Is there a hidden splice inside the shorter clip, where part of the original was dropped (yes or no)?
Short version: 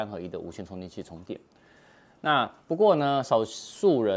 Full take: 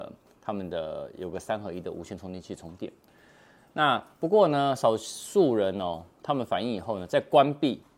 no